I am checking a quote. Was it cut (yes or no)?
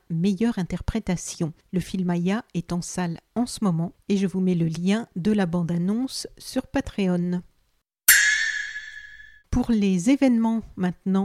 no